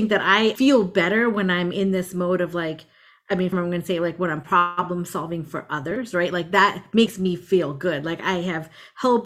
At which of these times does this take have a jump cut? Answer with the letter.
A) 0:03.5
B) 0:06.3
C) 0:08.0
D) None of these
A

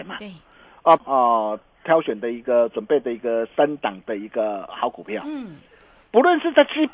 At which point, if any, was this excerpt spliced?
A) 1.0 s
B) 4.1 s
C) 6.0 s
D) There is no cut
A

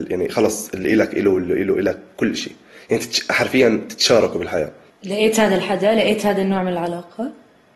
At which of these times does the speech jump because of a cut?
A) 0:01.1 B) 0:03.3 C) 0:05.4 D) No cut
D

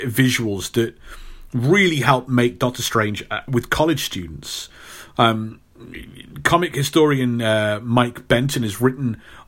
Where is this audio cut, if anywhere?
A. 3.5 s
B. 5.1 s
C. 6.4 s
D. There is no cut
A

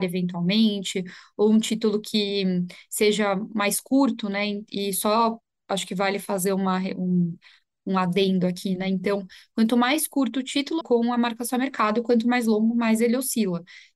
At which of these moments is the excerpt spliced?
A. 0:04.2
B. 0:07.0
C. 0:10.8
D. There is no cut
C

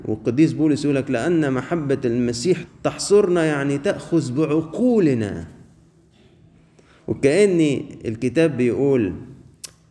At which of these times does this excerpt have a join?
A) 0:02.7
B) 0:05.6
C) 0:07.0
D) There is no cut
A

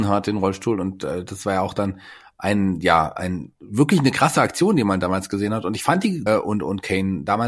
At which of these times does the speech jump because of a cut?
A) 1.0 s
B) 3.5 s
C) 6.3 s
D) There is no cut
C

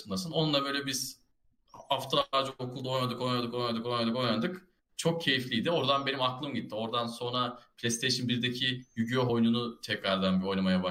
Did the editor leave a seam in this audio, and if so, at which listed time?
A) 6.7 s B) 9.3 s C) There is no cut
C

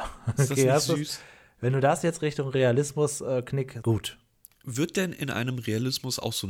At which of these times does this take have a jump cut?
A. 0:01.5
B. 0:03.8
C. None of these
B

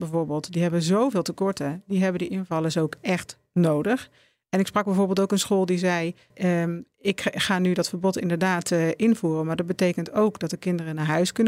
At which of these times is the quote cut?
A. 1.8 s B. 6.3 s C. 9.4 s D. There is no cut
B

